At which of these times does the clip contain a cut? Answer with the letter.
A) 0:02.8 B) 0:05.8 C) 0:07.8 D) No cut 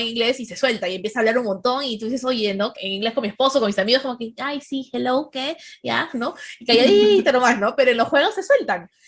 A